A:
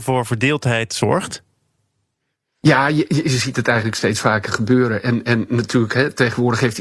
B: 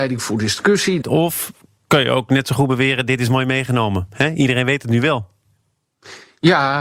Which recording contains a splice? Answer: B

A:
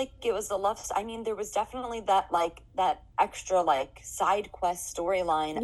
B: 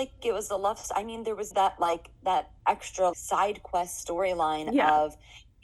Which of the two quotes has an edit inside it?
B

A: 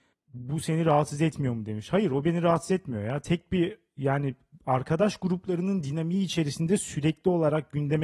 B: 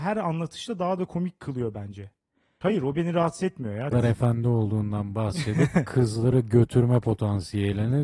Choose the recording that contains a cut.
B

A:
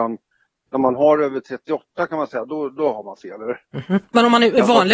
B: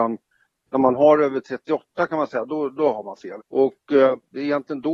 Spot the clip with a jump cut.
B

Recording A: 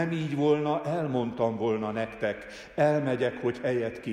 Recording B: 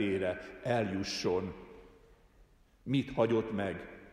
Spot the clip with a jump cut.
B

